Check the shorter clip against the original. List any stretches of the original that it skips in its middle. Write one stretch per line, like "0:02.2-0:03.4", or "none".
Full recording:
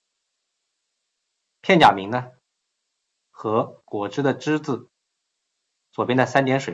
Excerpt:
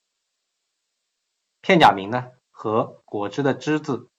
0:02.4-0:03.2